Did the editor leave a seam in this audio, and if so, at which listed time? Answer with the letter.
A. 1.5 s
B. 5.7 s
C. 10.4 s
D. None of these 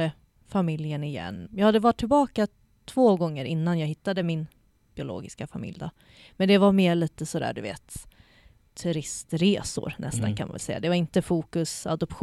A